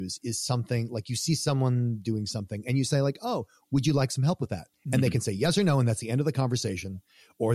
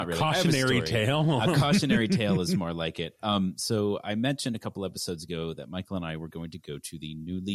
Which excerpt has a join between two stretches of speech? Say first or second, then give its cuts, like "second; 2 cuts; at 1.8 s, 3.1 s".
first; 1 cut; at 4.7 s